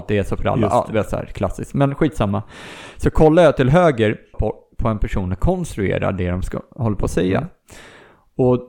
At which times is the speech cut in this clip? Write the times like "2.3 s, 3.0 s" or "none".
4.3 s